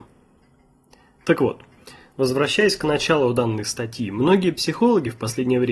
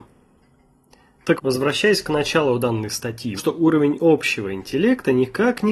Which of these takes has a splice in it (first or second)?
second